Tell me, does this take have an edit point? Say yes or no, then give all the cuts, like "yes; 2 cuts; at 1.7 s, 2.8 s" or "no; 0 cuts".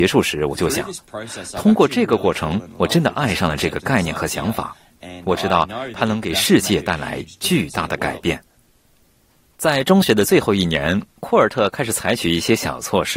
no; 0 cuts